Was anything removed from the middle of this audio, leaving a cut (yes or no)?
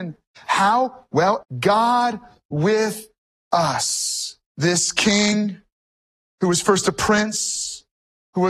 yes